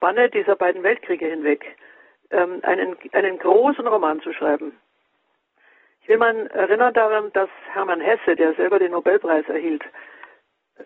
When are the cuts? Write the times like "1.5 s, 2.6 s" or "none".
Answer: none